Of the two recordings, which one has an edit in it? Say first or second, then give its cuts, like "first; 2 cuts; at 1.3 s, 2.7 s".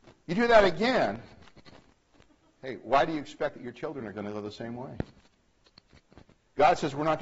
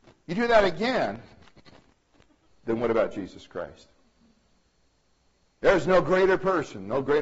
second; 1 cut; at 2.5 s